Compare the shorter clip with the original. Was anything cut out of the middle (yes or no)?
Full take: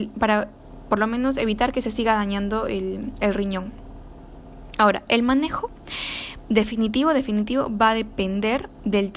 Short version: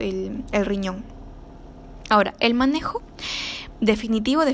no